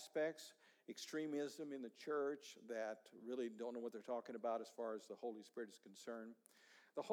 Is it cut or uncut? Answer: uncut